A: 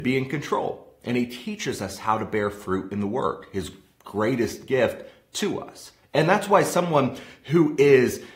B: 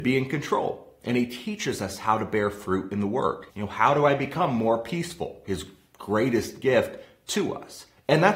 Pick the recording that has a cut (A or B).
B